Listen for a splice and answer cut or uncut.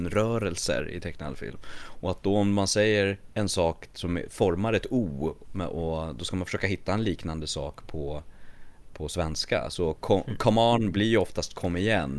uncut